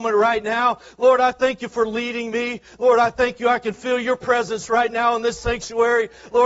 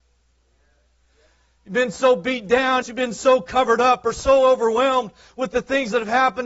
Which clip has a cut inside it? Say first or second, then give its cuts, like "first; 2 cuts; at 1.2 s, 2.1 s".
second; 1 cut; at 2.8 s